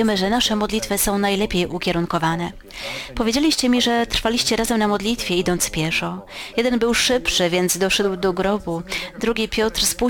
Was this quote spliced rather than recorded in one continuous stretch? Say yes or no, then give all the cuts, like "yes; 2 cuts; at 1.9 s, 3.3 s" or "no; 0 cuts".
yes; 1 cut; at 6.5 s